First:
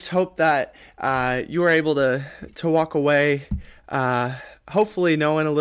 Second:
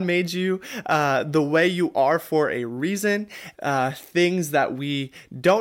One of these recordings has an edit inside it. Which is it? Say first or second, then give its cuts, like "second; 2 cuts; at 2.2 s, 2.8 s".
second; 1 cut; at 3.5 s